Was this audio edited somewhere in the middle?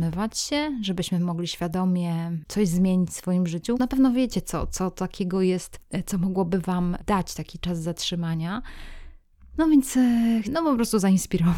yes; 2 cuts; at 3.7 s, 10.4 s

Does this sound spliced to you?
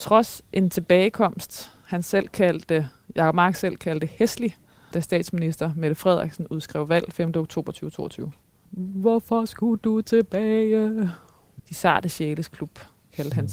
yes; 3 cuts; at 4.9 s, 8.7 s, 11.6 s

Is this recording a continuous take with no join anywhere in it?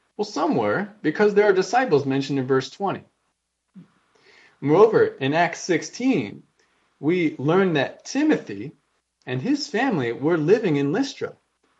yes; 0 cuts

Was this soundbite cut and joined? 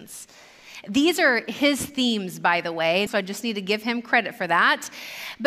yes; 1 cut; at 3.1 s

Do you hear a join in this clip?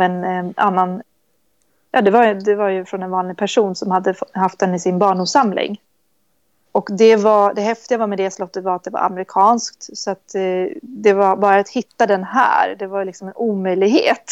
no; 0 cuts

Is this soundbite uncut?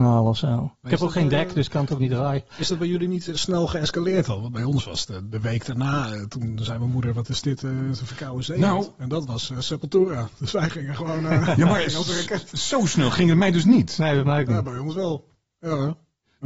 yes; 0 cuts

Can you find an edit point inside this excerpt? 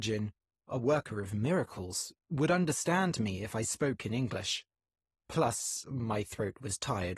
no; 0 cuts

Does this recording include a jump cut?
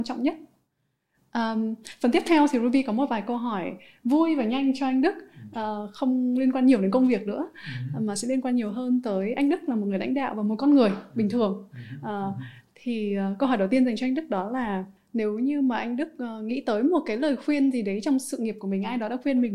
no; 0 cuts

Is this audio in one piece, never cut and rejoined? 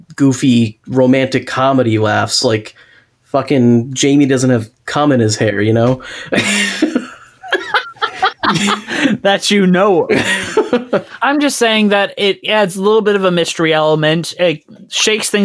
yes; 0 cuts

